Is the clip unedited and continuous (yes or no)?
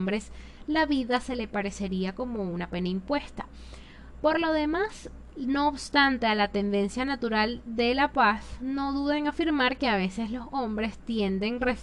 yes